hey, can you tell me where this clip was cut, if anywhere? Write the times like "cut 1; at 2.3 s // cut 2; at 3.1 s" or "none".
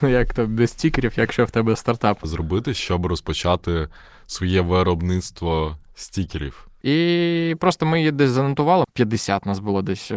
cut 1; at 2.2 s // cut 2; at 6.8 s // cut 3; at 8.8 s